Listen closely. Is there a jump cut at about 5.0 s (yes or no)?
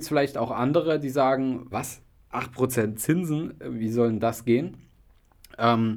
no